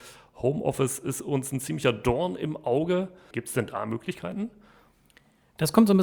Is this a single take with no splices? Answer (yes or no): no